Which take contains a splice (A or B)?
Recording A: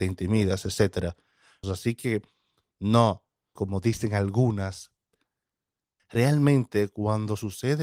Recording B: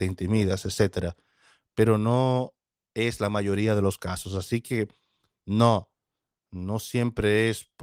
A